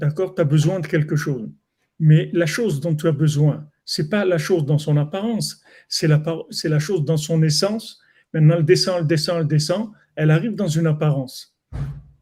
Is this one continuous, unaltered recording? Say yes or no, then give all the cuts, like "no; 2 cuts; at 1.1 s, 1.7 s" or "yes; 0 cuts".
yes; 0 cuts